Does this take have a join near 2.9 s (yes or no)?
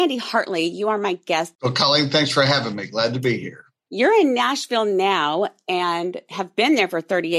no